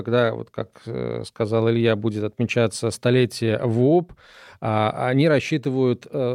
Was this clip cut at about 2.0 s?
no; 0 cuts

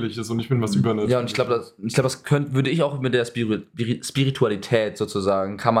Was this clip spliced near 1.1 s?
no; 0 cuts

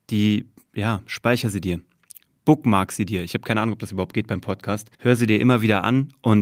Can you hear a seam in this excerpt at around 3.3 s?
no; 1 cut; at 4.9 s

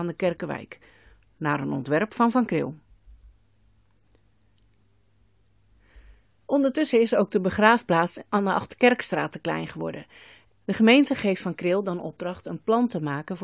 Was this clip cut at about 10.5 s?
yes; 1 cut; at 10.5 s

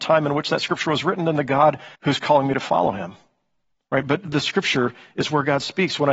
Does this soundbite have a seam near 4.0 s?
no; 1 cut; at 1.9 s

